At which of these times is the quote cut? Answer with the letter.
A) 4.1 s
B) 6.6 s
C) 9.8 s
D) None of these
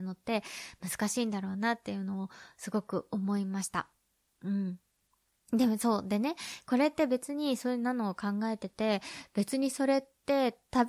D